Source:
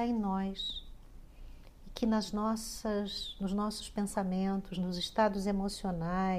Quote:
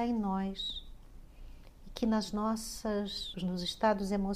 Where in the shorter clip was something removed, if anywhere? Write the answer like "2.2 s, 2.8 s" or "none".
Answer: 3.3 s

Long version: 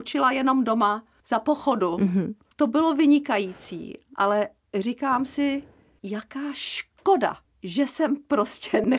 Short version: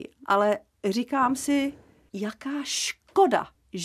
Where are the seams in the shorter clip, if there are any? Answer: none

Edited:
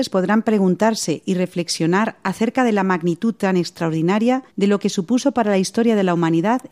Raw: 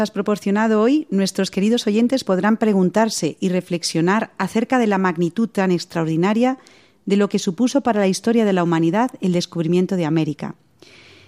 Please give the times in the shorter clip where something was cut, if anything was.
4.5 s

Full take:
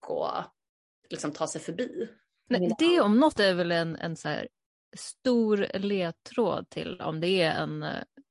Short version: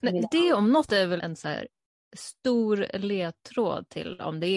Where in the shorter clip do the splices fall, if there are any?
1.2 s

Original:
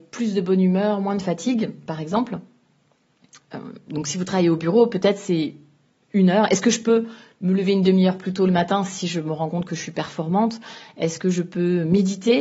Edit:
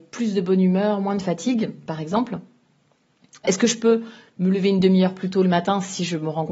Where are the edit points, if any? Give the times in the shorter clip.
3.4 s

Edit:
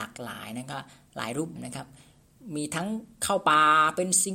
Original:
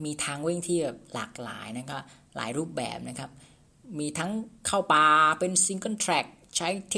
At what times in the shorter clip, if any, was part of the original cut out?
1.6 s

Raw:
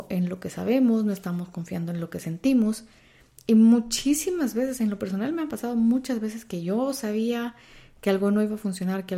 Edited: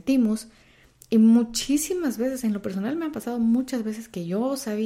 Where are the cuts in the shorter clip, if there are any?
none

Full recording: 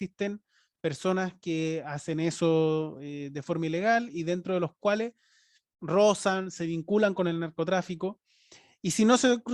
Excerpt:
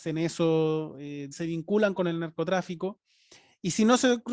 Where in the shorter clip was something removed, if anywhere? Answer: 1.3 s

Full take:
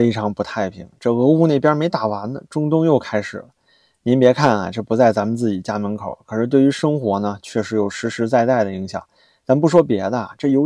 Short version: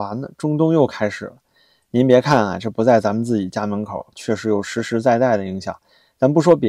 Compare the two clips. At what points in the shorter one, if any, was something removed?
4.1 s

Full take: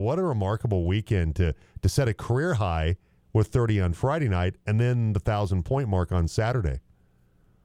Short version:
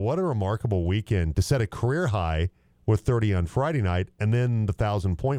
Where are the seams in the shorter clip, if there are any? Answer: 1.3 s

